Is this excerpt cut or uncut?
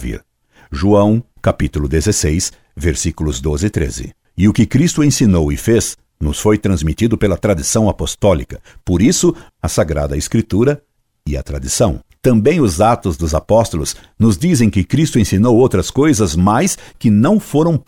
cut